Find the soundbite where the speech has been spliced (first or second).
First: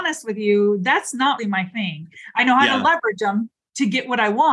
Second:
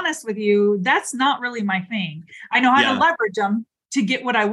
first